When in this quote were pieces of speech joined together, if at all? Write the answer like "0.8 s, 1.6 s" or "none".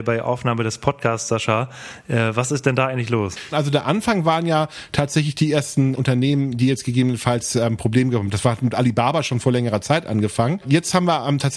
3.5 s, 6.0 s